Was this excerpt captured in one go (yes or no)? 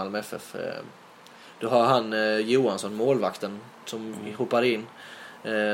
yes